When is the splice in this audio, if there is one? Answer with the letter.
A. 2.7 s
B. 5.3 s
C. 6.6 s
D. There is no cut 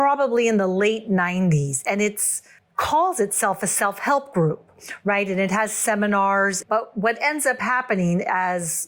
C